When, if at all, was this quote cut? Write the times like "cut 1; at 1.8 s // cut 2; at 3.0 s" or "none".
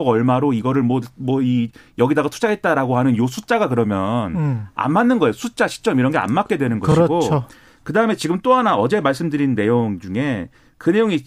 none